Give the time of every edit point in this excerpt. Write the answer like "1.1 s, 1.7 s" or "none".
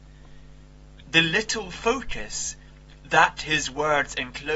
1.0 s